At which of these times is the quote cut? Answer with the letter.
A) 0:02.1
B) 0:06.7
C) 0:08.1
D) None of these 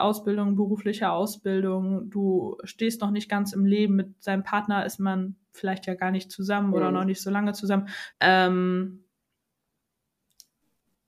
C